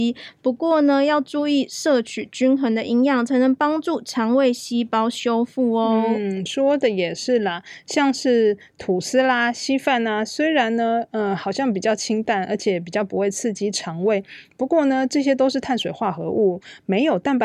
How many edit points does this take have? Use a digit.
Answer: 0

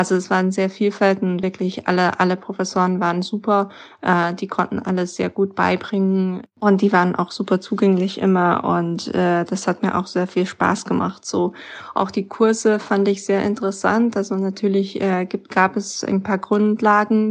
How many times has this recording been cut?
0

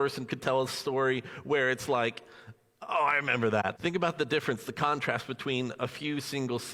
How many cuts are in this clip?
1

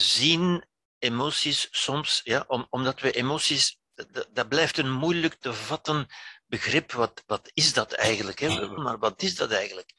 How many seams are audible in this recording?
1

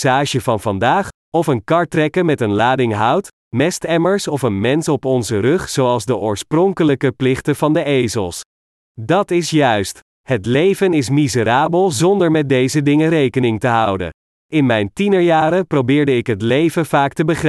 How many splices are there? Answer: 1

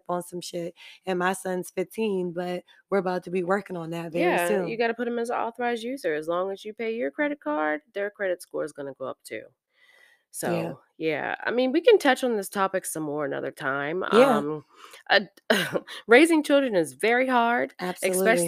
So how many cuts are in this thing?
0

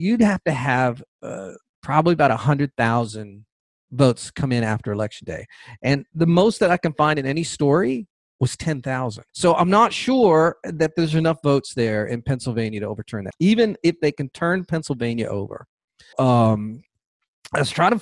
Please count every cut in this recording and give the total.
3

